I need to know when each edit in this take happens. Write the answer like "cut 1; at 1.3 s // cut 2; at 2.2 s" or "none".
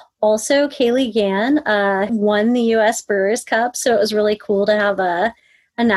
cut 1; at 2.1 s